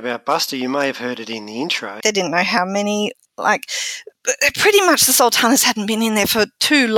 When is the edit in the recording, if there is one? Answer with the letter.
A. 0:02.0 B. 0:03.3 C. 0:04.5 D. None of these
A